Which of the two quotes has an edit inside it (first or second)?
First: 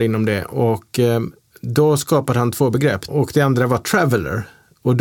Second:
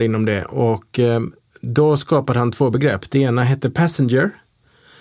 first